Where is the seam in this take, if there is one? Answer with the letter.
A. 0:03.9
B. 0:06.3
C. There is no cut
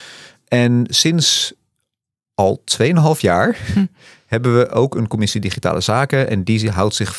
C